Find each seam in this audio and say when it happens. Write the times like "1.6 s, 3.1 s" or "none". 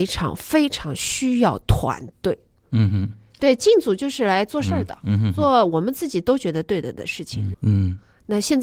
3.4 s, 7.5 s